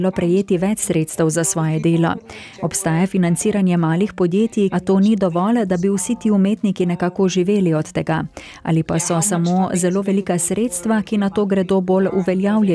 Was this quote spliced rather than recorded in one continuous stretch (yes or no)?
yes